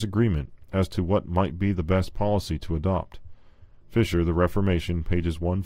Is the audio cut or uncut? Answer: cut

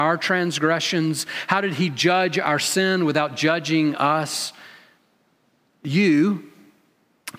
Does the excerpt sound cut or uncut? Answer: uncut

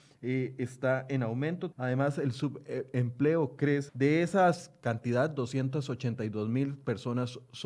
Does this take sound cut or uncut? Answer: cut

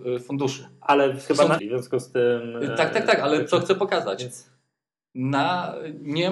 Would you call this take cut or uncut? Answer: cut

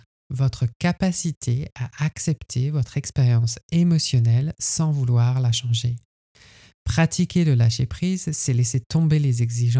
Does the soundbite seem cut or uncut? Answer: uncut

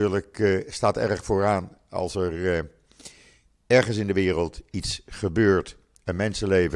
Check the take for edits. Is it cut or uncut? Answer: uncut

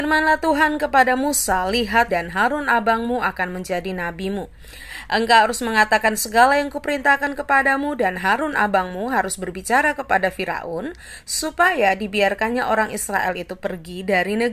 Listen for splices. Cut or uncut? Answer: cut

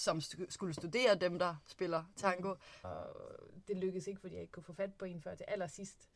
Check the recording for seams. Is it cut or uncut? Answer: cut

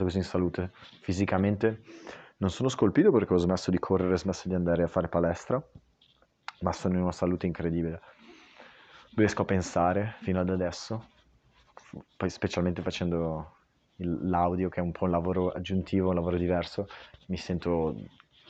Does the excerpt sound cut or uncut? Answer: cut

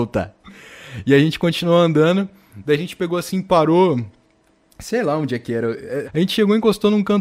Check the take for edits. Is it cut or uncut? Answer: cut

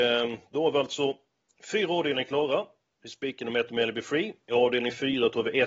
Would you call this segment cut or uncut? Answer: uncut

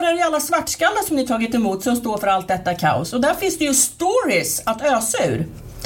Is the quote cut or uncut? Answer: uncut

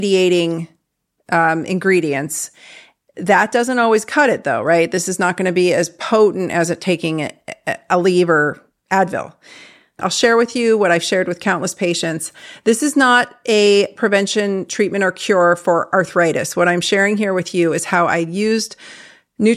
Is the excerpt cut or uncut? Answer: cut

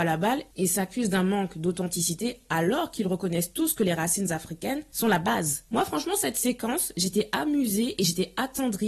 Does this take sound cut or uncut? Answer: uncut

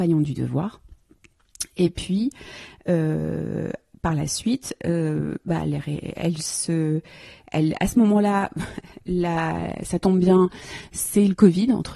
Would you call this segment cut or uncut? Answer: uncut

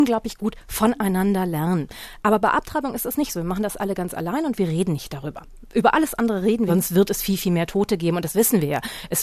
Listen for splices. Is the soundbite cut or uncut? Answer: cut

